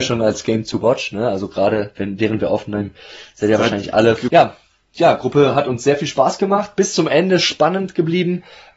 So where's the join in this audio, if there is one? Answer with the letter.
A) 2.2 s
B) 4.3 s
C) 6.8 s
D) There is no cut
B